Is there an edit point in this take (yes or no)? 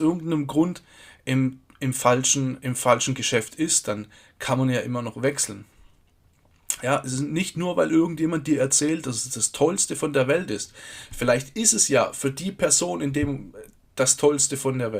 no